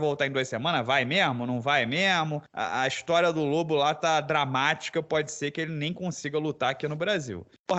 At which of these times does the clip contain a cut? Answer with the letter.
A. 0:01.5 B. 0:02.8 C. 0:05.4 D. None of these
D